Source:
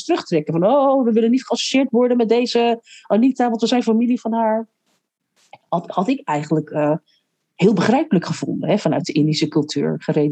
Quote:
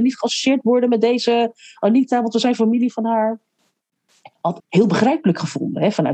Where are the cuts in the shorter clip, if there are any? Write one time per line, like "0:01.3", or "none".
0:04.6

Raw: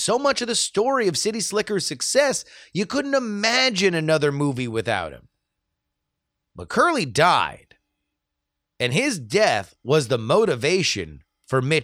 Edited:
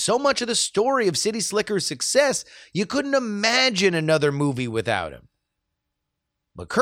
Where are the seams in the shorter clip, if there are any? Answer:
none

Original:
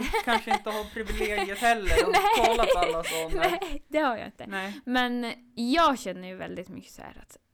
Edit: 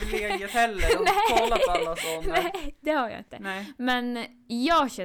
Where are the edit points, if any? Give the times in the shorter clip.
none

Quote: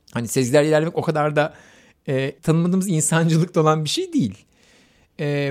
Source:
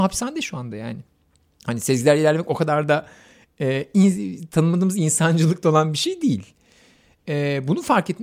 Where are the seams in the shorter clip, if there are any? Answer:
0:02.4

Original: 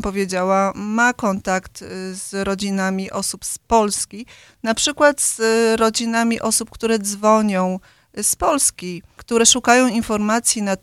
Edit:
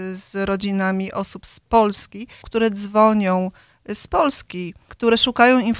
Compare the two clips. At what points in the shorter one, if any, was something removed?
0:02.4

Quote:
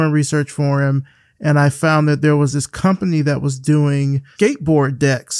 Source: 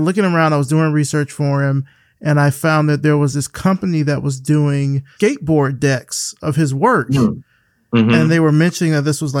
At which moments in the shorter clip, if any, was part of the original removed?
none

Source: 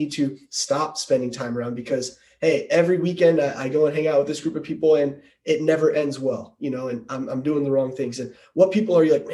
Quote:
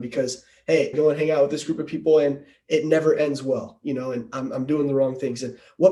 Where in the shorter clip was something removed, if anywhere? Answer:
0:00.9

